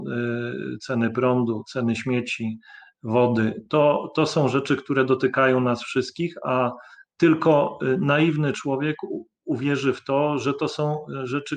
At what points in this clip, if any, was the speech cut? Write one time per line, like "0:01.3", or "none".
none